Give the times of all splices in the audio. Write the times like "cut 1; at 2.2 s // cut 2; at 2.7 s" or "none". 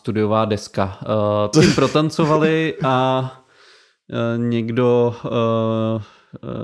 cut 1; at 1.5 s